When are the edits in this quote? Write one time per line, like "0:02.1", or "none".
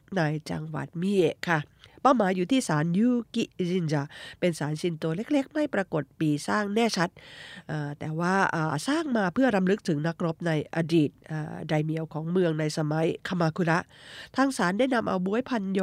none